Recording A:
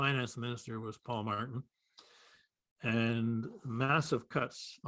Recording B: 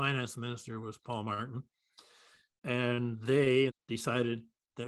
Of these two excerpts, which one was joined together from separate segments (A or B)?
B